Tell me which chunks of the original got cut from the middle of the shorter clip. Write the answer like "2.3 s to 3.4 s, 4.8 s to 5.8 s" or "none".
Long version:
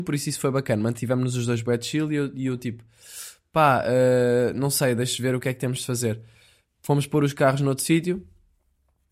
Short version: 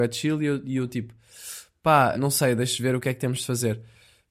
3.8 s to 4.5 s